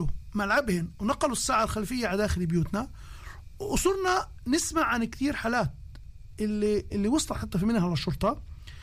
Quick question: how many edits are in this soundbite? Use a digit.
1